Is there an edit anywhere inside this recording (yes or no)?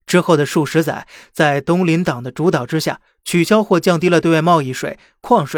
no